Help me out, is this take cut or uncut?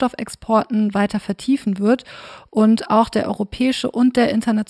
uncut